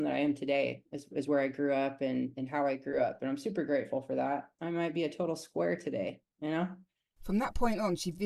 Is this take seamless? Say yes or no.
no